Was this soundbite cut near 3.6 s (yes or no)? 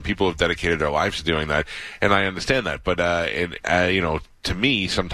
yes